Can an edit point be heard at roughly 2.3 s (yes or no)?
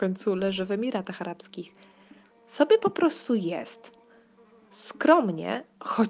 yes